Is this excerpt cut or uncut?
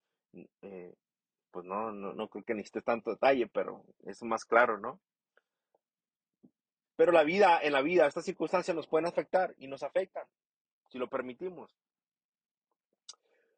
uncut